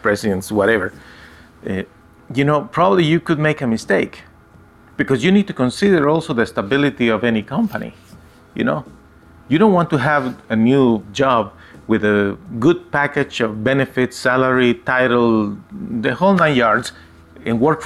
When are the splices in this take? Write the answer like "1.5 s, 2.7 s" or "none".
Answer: none